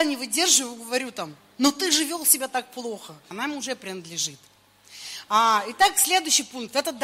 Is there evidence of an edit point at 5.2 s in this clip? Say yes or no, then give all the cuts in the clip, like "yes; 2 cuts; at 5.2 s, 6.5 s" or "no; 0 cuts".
no; 1 cut; at 3.3 s